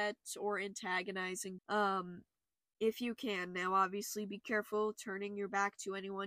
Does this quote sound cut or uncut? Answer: cut